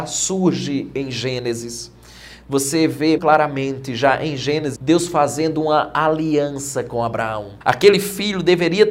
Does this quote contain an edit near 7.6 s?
yes; 3 cuts; at 3.2 s, 4.8 s, 7.6 s

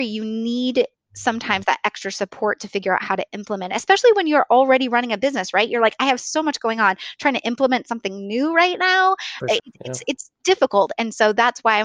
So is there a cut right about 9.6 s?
yes; 1 cut; at 9.6 s

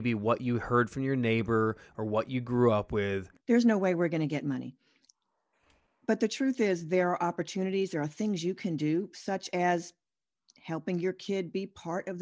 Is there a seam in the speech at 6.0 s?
no; 1 cut; at 3.4 s

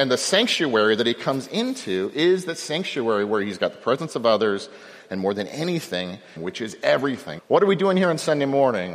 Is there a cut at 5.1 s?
no; 2 cuts; at 6.4 s, 7.4 s

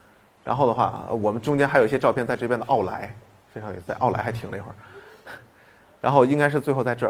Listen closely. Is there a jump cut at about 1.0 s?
no; 0 cuts

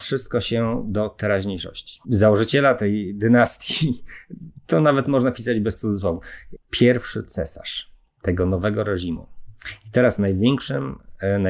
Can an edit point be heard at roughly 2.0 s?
yes; 2 cuts; at 2.0 s, 6.6 s

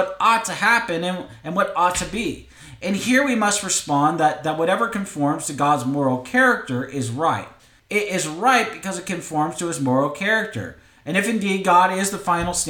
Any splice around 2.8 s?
no; 1 cut; at 7.8 s

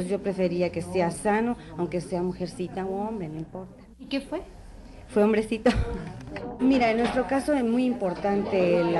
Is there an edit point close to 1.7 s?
no; 2 cuts; at 3.9 s, 6.6 s

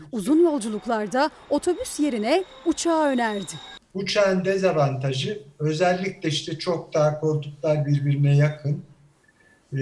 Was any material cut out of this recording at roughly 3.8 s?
no; 0 cuts

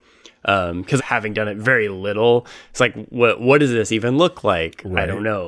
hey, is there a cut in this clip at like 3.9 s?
no; 1 cut; at 1.0 s

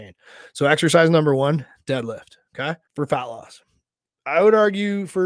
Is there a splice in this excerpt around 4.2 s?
no; 1 cut; at 2.9 s

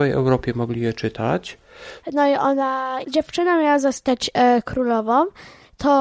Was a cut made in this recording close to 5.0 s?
no; 2 cuts; at 2.0 s, 3.0 s

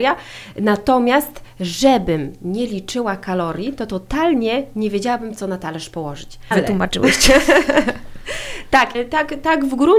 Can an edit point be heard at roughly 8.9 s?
yes; 2 cuts; at 6.5 s, 8.9 s

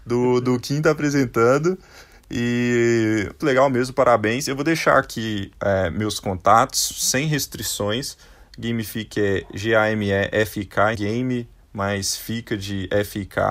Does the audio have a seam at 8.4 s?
yes; 3 cuts; at 3.4 s, 8.4 s, 10.9 s

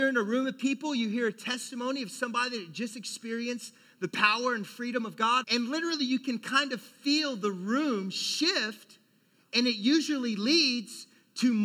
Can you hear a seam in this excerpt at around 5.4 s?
yes; 1 cut; at 5.4 s

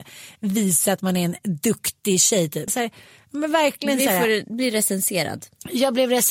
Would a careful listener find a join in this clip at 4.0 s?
no; 1 cut; at 2.7 s

